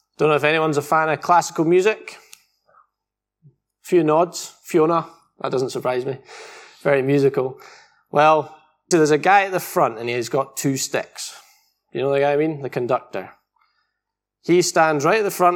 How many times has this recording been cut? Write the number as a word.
one